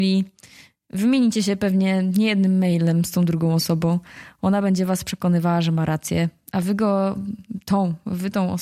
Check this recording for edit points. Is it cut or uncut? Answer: uncut